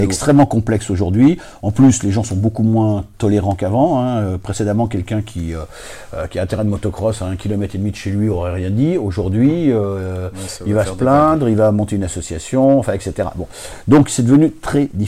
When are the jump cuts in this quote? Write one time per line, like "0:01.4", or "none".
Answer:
none